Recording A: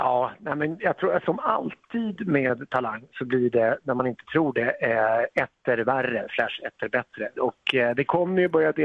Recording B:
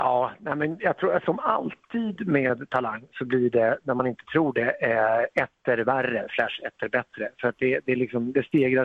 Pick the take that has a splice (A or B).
A